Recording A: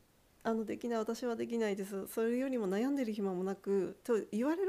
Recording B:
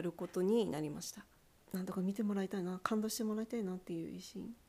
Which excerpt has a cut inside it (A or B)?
B